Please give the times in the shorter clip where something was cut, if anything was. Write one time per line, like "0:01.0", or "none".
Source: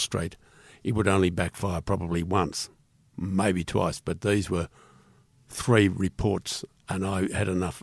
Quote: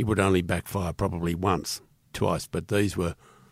0:02.1